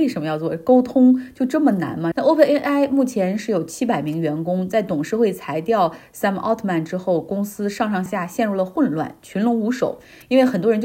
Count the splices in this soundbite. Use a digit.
2